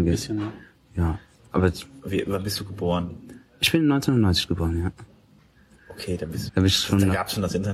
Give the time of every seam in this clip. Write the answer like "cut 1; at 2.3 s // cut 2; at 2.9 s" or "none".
cut 1; at 6.5 s